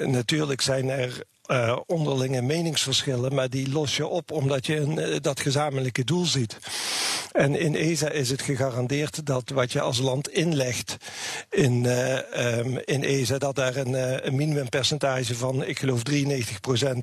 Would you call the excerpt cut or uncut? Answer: uncut